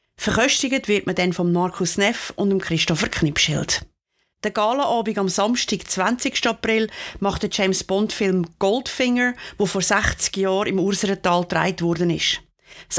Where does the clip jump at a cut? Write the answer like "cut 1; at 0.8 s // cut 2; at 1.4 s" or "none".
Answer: none